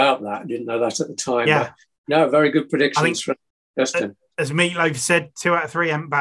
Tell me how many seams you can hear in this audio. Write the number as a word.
zero